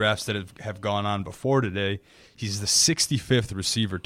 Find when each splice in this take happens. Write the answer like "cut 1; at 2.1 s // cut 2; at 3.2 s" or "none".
none